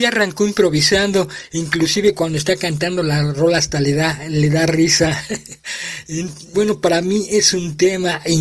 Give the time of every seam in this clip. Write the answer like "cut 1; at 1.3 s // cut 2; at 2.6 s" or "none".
cut 1; at 6.5 s